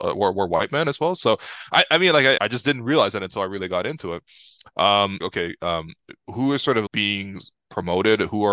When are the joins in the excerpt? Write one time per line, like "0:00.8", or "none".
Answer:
0:02.4
0:05.2
0:06.9